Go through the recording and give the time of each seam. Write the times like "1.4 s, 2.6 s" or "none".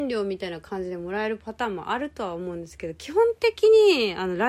none